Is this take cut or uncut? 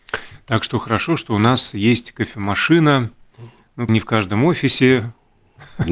cut